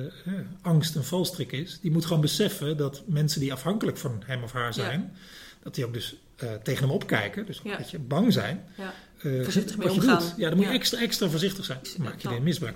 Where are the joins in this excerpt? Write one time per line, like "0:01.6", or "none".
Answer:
0:09.1
0:11.8